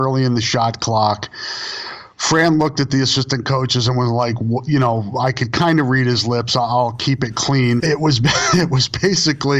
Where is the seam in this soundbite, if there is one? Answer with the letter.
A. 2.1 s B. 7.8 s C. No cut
B